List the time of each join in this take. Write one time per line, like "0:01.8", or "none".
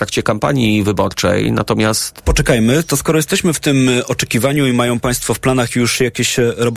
0:02.2